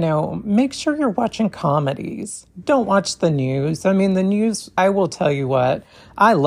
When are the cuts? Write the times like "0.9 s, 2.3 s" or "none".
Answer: 4.8 s